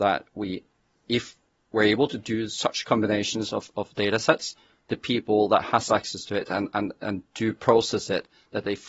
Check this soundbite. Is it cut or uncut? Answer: uncut